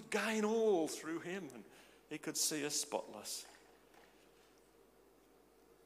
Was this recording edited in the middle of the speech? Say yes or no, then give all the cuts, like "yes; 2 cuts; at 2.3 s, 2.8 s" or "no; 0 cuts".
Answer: no; 0 cuts